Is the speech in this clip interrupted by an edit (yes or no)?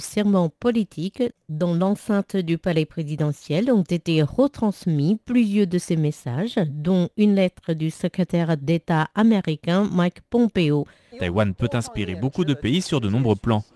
yes